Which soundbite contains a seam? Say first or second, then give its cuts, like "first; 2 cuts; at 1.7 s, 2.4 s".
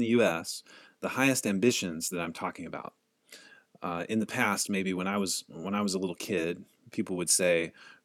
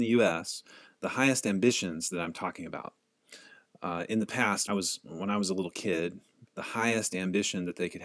second; 2 cuts; at 4.7 s, 6.4 s